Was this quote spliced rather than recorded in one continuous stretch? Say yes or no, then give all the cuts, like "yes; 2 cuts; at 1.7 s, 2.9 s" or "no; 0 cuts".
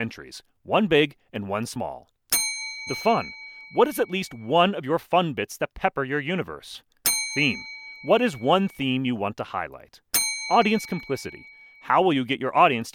yes; 1 cut; at 2.9 s